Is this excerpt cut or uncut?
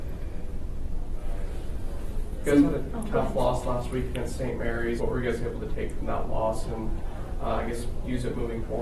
cut